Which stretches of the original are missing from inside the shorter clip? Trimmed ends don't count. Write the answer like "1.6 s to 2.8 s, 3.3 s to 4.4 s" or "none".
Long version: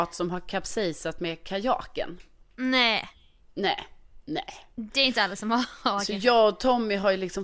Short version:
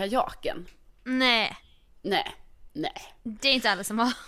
none